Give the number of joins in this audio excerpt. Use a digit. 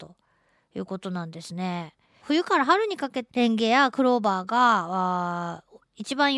2